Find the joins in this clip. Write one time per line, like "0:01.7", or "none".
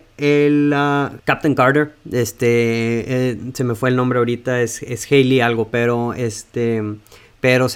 none